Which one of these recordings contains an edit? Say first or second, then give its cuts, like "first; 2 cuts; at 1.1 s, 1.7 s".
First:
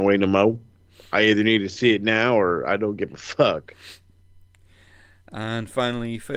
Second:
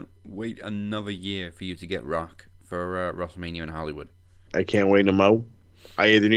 second; 1 cut; at 4.5 s